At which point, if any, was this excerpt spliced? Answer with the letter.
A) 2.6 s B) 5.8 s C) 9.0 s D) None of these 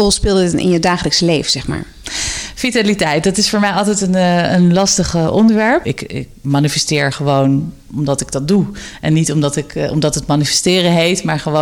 B